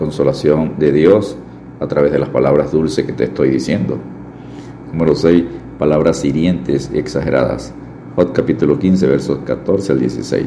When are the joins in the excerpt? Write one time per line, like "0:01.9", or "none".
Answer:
none